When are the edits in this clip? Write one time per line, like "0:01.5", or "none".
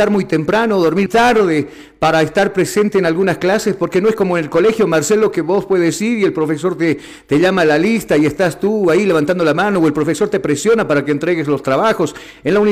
0:01.1